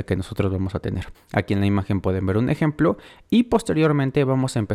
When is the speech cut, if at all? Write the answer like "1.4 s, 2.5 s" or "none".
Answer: 1.1 s

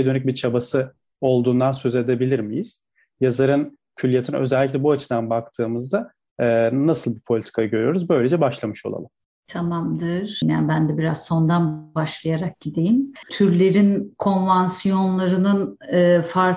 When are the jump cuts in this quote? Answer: 10.4 s, 13.2 s

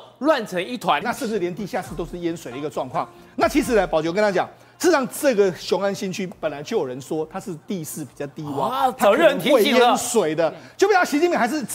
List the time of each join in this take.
1.0 s

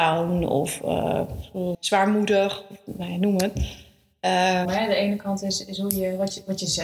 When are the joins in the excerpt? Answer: 1.7 s, 4.7 s

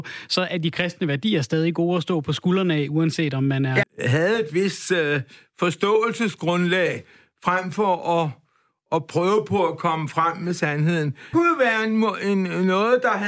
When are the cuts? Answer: 3.8 s, 11.3 s

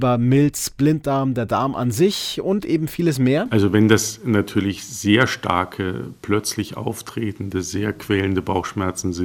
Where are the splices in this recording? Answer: none

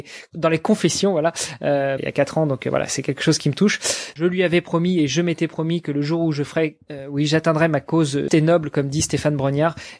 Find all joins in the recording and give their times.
2.0 s, 4.1 s, 8.3 s

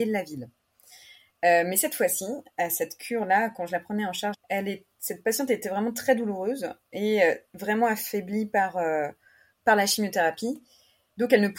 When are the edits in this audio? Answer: 4.3 s

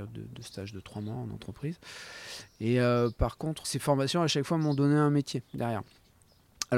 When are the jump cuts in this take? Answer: 3.6 s

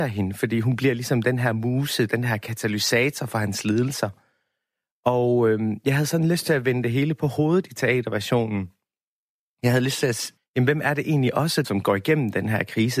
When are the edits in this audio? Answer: 10.4 s, 11.6 s

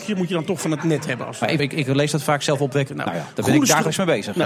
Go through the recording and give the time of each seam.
1.6 s, 2.9 s

